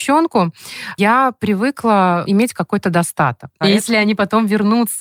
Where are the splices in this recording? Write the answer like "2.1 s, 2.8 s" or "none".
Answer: 2.2 s, 3.6 s